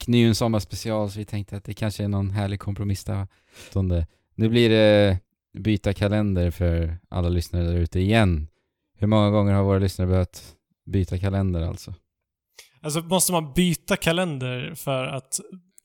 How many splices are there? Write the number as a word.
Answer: one